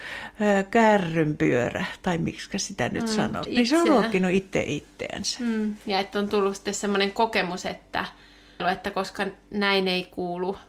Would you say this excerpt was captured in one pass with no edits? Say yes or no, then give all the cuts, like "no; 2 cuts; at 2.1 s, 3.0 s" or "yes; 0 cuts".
no; 2 cuts; at 3.5 s, 8.6 s